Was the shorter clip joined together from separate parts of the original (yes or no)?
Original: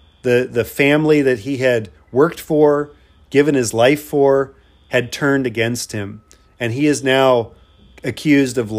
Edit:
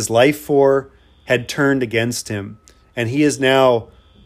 no